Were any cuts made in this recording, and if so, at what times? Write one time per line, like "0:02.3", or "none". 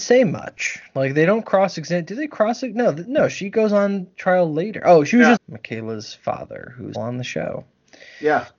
0:05.4
0:06.9

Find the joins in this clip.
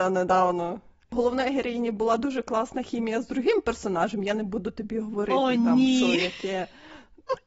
0:01.1

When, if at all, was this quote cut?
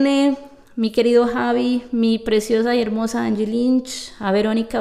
none

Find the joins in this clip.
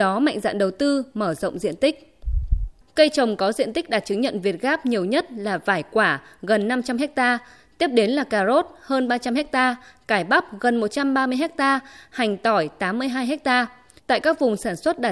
0:02.8
0:14.0

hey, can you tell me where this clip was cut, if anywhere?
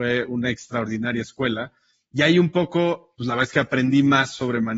none

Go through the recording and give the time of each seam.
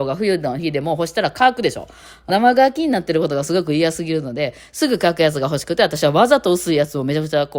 0:02.3

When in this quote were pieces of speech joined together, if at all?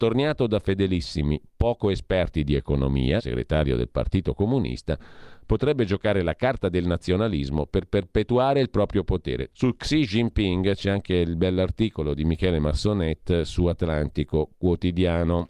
0:03.2
0:09.5

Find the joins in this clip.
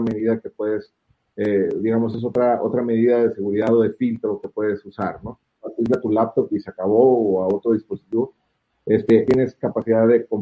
0:05.6
0:09.3

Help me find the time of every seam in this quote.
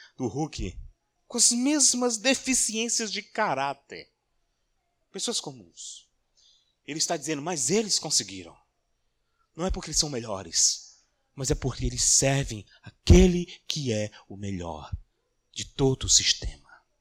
0:01.2

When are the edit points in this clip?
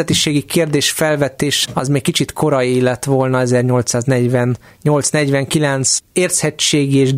0:01.6

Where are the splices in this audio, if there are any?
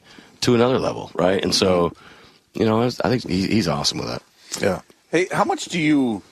0:03.2

